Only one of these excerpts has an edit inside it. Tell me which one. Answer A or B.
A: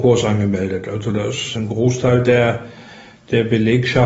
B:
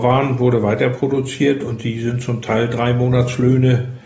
A